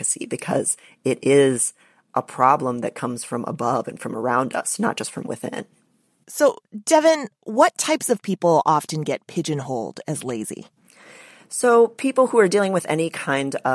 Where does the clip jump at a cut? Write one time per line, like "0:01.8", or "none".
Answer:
none